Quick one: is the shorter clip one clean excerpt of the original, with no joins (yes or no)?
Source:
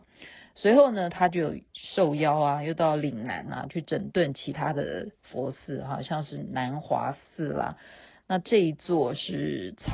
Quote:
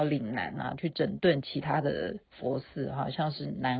yes